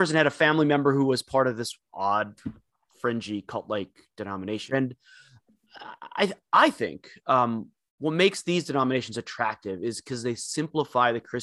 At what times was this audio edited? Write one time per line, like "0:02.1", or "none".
0:04.7